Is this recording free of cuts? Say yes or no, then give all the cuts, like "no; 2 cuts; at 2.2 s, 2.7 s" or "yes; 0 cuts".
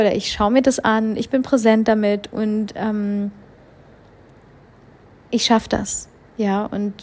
yes; 0 cuts